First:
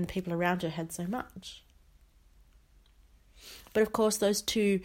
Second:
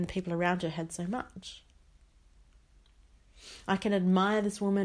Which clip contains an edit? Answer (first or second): second